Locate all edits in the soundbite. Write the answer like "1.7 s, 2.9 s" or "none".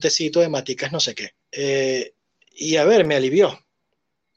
1.4 s